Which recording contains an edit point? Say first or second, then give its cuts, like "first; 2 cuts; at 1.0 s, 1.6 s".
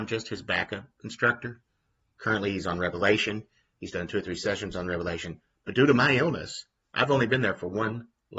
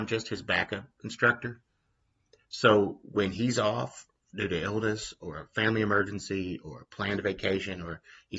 first; 1 cut; at 2.1 s